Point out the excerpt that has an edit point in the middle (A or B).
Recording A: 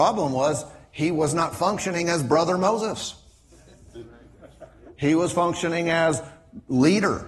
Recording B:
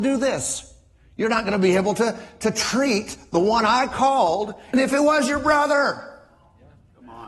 B